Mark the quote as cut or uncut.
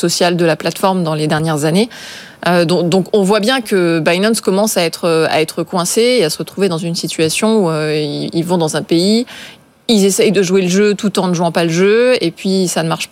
uncut